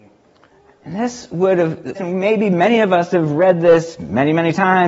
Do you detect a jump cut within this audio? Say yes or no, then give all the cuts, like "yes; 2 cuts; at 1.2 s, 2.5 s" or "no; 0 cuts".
yes; 1 cut; at 1.9 s